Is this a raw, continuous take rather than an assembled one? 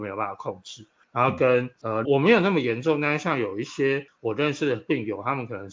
no; 1 cut; at 2.0 s

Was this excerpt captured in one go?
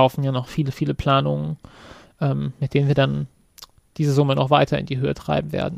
yes; 0 cuts

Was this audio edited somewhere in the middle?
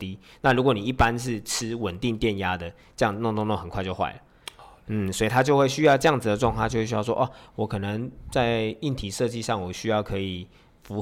no; 0 cuts

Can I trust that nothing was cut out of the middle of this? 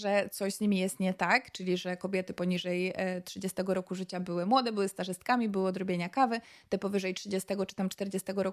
yes; 0 cuts

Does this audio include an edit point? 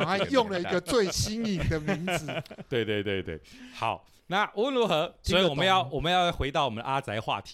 yes; 2 cuts; at 3.2 s, 5.2 s

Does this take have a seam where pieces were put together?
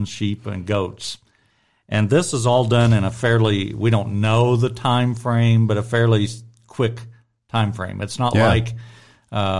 no; 0 cuts

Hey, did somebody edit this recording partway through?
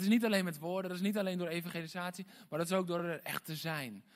no; 0 cuts

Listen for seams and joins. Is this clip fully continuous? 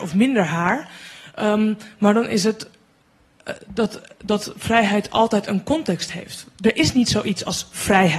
yes; 0 cuts

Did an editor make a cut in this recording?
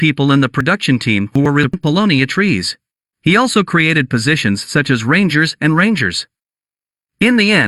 yes; 1 cut; at 3.0 s

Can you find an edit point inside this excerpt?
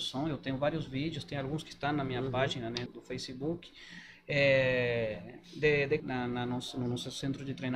yes; 2 cuts; at 2.9 s, 6.0 s

